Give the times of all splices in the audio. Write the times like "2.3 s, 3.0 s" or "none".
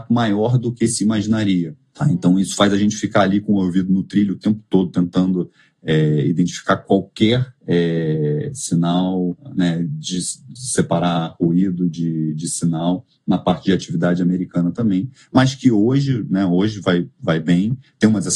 none